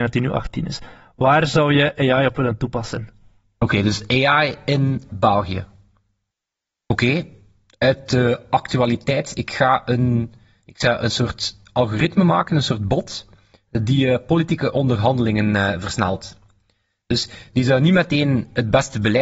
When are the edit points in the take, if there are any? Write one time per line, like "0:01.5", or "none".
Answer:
none